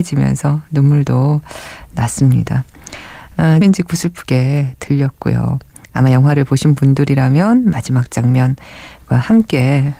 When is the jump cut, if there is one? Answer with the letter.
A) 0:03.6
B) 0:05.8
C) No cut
A